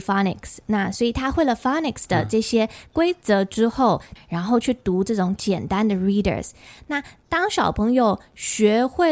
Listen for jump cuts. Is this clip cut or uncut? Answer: cut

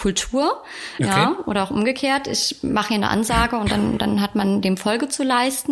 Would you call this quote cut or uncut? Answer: cut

